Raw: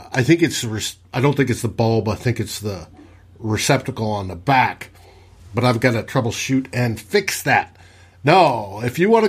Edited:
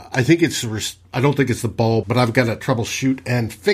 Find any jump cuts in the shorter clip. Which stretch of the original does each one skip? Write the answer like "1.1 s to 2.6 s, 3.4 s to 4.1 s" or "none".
2.0 s to 5.5 s